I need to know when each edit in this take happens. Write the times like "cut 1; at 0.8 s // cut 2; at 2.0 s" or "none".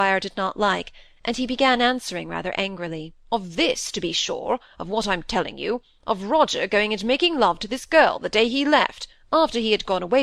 cut 1; at 3.2 s